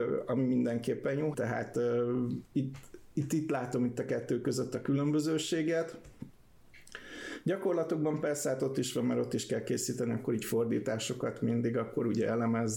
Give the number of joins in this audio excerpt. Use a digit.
1